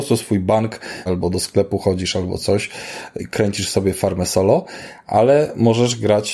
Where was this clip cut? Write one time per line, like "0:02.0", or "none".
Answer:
0:01.1
0:03.2